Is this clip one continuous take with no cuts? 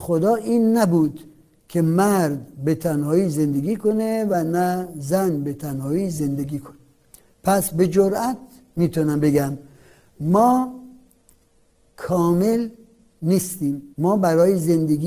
no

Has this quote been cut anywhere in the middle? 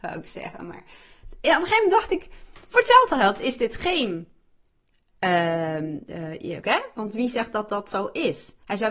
yes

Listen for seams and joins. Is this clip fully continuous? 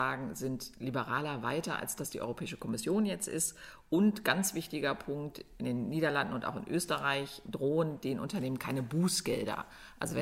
yes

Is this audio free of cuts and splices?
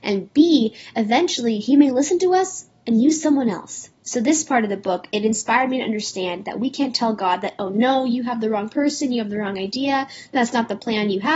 no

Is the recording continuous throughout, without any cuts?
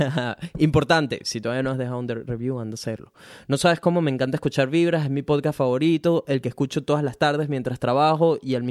yes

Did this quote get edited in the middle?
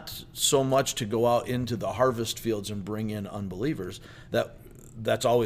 no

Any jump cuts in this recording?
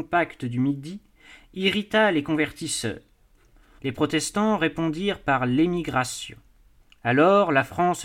yes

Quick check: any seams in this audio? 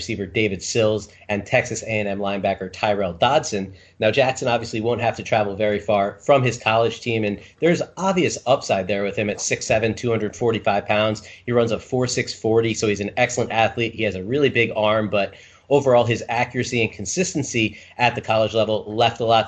no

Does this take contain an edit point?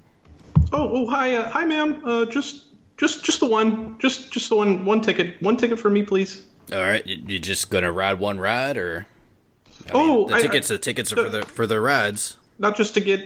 no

